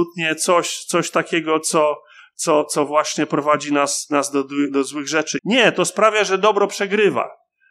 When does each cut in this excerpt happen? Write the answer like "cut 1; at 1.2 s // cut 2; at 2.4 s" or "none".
cut 1; at 5.4 s